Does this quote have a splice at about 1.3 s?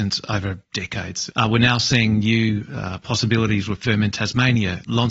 yes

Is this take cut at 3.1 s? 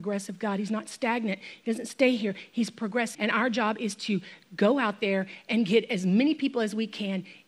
yes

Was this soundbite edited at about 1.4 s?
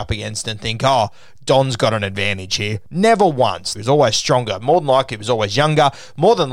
no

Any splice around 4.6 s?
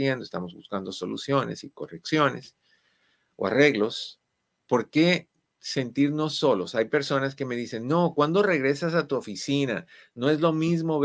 yes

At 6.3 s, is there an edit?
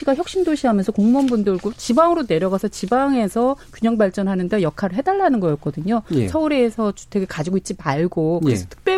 no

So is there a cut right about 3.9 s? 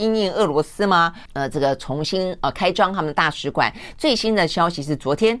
no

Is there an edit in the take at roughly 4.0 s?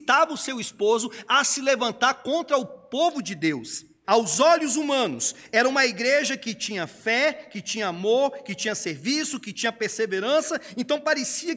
yes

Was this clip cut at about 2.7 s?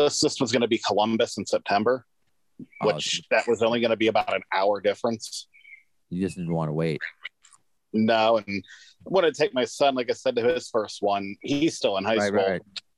no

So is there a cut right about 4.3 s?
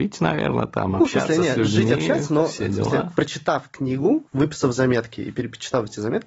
yes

